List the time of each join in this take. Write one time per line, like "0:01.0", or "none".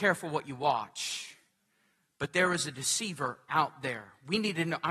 none